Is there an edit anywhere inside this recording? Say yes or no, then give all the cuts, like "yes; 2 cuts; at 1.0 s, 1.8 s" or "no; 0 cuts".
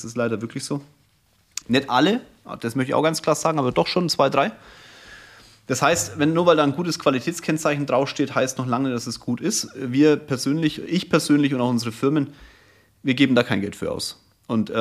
yes; 1 cut; at 1.6 s